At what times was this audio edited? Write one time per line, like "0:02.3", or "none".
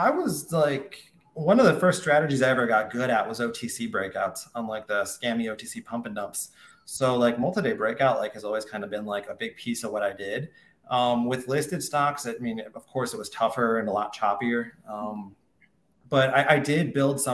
none